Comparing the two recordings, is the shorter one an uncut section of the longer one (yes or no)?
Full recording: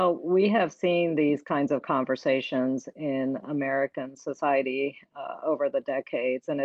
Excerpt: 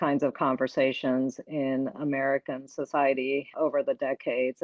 no